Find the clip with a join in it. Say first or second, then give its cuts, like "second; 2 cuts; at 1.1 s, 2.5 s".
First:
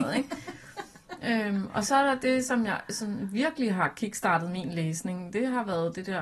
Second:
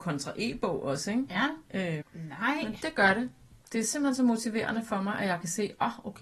second; 1 cut; at 2.0 s